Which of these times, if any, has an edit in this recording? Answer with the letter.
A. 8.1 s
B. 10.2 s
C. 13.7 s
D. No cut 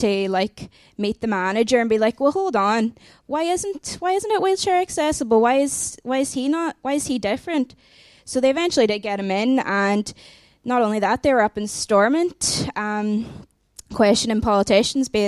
D